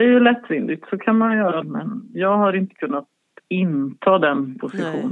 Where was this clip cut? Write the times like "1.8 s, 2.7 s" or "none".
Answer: 1.6 s